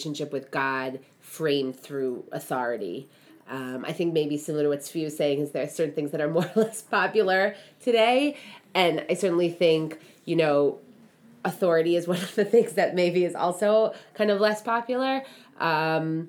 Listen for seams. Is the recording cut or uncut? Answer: uncut